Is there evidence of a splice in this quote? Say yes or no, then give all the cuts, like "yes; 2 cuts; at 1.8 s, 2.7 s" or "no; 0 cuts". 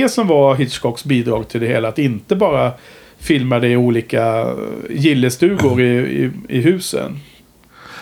no; 0 cuts